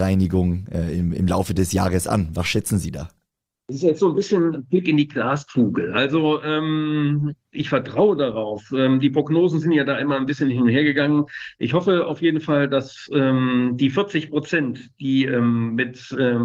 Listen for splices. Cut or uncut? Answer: uncut